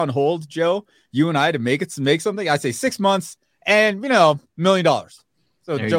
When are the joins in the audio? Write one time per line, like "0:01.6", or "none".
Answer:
none